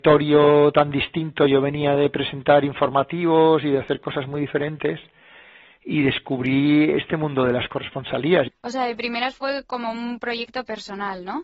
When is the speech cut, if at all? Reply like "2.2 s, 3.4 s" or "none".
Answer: 8.5 s